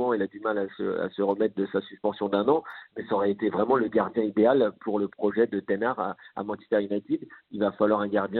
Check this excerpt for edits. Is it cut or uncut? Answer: uncut